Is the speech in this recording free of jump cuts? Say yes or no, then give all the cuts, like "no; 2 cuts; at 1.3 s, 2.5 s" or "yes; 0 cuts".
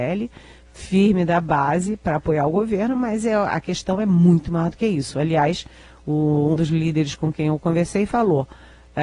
no; 1 cut; at 6.6 s